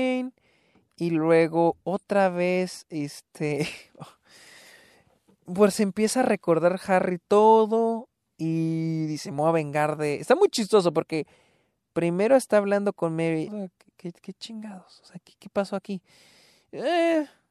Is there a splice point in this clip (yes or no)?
yes